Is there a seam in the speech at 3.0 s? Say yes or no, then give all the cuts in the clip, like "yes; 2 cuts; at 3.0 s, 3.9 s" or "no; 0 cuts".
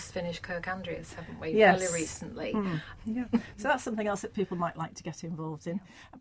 yes; 1 cut; at 3.0 s